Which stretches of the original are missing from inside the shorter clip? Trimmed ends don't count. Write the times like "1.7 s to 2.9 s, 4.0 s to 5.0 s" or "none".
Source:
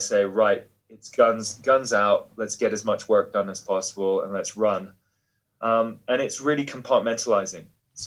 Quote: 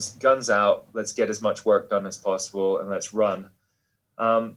none